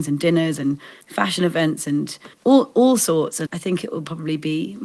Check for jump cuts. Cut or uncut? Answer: cut